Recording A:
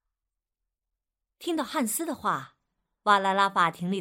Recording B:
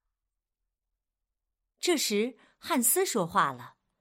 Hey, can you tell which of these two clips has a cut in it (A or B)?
A